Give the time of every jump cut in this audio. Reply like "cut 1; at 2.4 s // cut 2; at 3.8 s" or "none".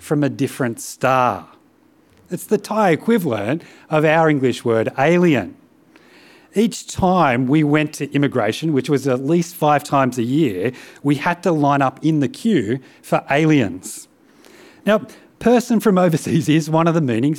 none